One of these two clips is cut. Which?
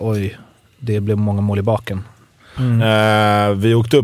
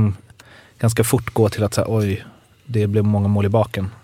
first; 1 cut; at 2.6 s

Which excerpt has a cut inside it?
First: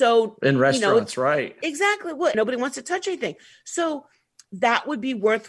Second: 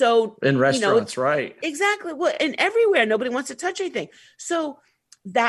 first; 1 cut; at 2.3 s

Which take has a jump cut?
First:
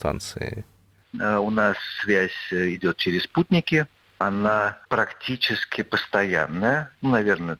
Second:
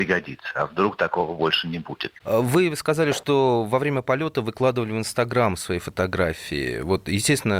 first; 1 cut; at 1.0 s

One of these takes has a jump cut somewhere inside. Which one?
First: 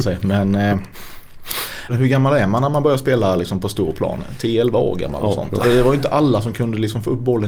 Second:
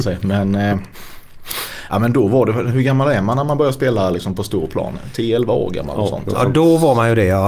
first; 2 cuts; at 1.9 s, 5.6 s

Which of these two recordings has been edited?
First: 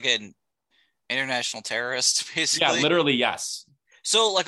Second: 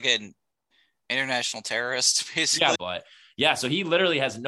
second; 1 cut; at 2.8 s

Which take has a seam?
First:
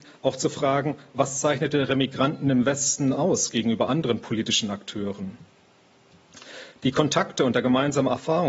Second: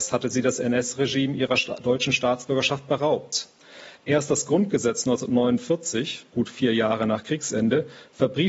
second; 1 cut; at 6.3 s

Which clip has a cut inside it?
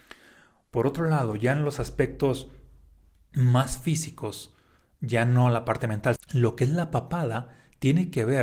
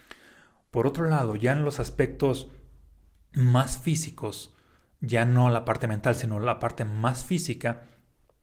first; 1 cut; at 6.2 s

